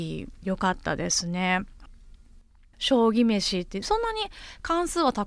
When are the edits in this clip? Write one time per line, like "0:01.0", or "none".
0:02.7